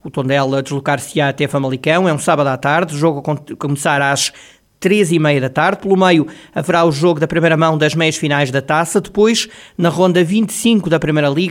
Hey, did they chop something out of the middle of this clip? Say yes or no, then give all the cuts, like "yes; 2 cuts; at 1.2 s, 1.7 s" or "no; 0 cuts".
no; 0 cuts